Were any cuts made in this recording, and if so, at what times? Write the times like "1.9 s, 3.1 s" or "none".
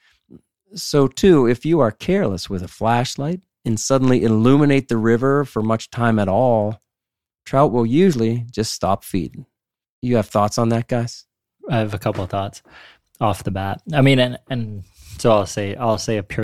none